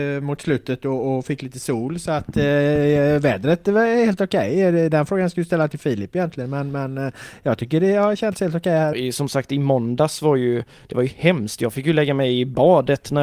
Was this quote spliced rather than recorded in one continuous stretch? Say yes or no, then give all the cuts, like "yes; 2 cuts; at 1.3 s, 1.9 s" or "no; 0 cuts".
yes; 1 cut; at 8.9 s